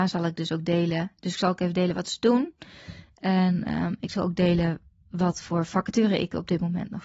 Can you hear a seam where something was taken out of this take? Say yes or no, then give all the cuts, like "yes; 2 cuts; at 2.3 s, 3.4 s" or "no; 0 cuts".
no; 0 cuts